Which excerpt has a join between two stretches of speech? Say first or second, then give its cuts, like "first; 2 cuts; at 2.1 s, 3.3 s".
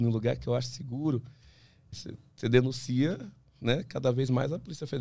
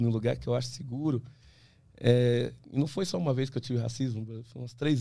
first; 1 cut; at 1.9 s